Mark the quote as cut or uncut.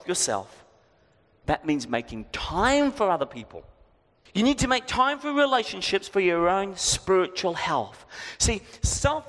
cut